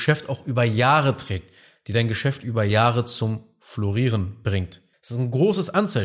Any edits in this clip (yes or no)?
yes